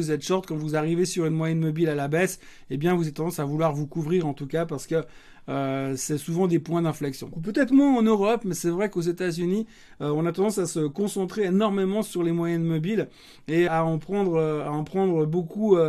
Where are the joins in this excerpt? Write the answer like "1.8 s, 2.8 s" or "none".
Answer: 7.3 s, 13.7 s

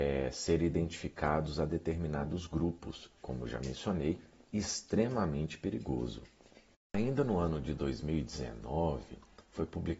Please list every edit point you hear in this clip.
3.2 s

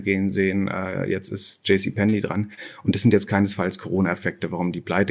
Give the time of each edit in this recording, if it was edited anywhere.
none

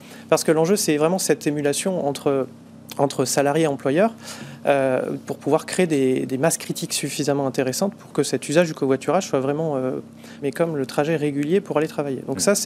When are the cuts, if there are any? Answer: 6.3 s, 10.4 s

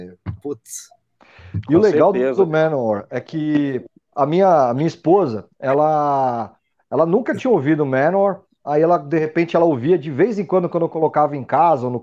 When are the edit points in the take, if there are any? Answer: none

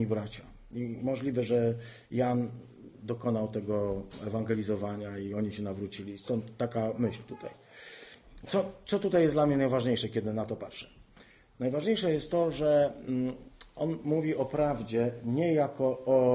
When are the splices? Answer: none

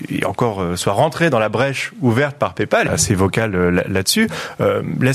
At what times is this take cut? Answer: 2.8 s

